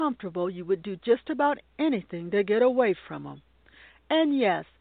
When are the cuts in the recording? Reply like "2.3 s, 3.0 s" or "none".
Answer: none